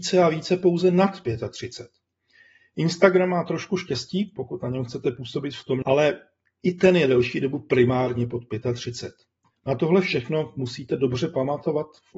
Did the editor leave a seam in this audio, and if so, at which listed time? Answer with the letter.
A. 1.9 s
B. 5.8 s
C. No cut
B